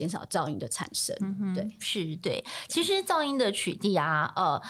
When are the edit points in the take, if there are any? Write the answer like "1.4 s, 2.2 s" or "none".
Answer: none

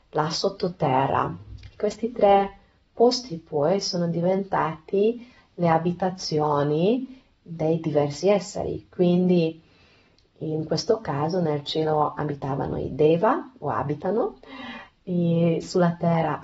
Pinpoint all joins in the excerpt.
none

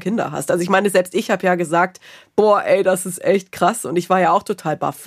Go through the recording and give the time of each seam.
none

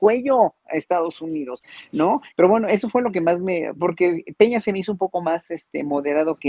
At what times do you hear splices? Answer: 2.3 s, 3.8 s

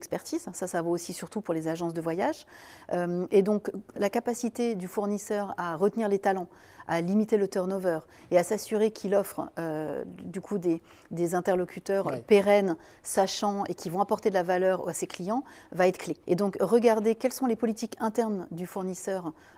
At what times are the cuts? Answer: 3.9 s, 16.2 s

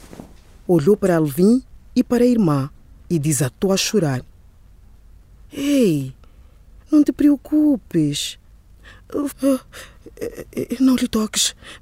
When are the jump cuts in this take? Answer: 6.8 s, 9.3 s

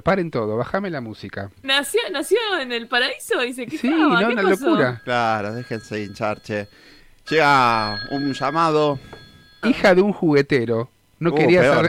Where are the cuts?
1.6 s, 9.6 s

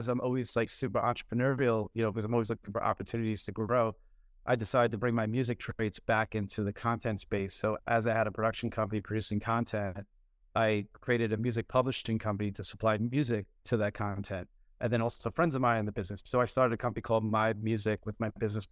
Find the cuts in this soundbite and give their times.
none

